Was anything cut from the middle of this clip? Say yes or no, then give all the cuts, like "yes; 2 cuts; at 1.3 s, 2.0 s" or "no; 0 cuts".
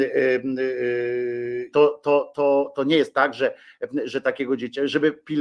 yes; 1 cut; at 1.7 s